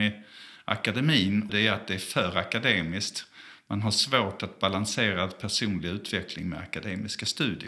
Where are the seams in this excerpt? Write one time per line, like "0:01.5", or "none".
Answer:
0:01.5